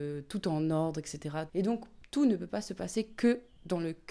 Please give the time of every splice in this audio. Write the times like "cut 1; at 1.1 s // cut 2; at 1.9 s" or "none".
cut 1; at 1.5 s